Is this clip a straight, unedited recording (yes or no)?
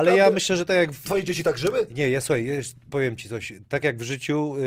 no